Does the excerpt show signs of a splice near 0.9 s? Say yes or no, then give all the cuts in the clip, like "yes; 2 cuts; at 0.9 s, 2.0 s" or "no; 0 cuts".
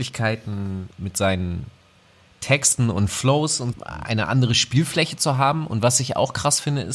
yes; 2 cuts; at 0.9 s, 3.7 s